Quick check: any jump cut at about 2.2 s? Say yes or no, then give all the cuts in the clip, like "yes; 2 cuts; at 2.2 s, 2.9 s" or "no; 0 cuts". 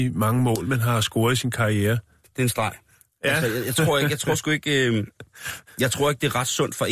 yes; 1 cut; at 2.2 s